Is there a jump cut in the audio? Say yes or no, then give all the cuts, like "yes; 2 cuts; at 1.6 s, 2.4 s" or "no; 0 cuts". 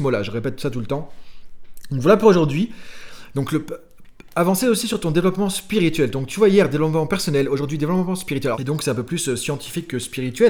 yes; 1 cut; at 8.5 s